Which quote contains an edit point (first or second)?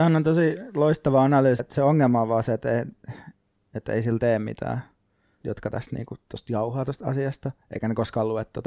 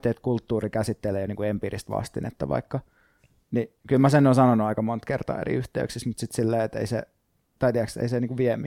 first